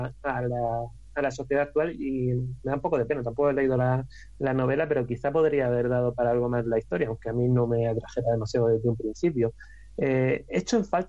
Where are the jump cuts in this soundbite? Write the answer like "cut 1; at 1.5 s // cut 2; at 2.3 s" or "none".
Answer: none